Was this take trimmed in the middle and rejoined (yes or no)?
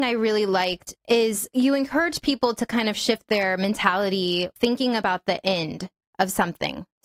no